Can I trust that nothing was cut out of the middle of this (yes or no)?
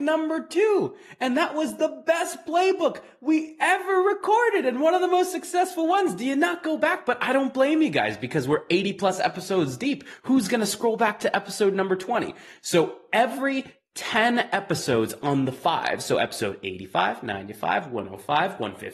yes